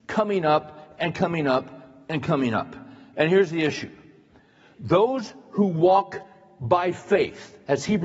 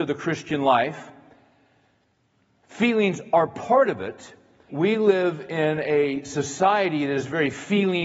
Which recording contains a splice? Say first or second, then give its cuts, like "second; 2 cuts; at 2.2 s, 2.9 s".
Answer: second; 1 cut; at 4.7 s